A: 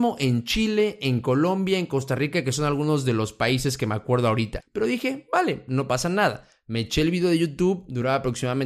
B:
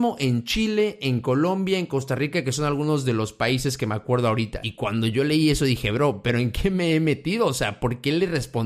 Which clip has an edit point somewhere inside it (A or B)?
A